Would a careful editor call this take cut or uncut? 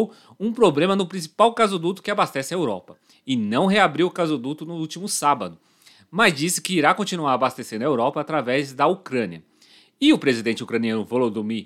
uncut